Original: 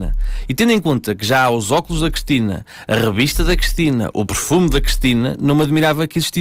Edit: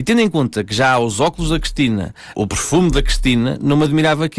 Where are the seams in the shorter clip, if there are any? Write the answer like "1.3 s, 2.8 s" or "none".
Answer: 2.3 s